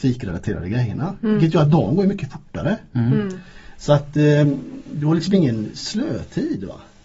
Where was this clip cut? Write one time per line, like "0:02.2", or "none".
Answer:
none